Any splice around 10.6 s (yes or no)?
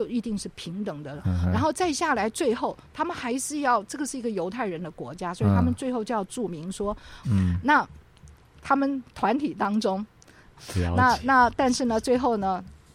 yes